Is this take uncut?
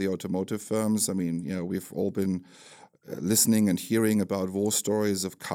yes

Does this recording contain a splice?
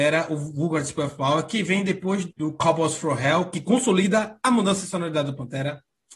yes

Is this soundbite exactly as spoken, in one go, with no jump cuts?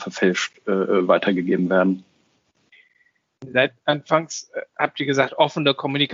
yes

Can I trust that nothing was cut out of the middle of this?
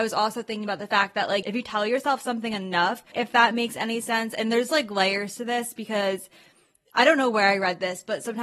no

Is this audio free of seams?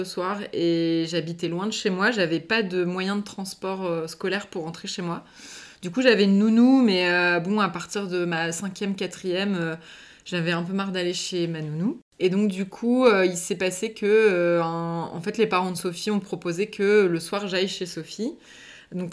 yes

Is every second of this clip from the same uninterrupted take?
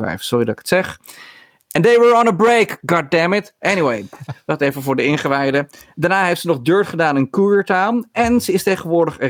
no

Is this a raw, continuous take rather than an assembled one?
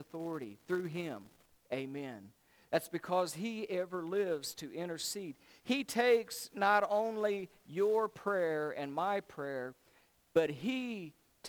yes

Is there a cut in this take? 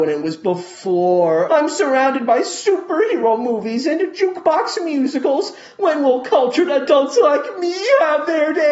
yes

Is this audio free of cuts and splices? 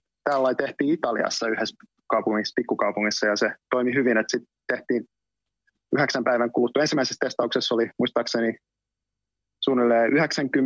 yes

